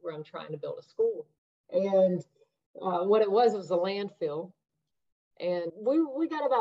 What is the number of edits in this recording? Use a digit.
2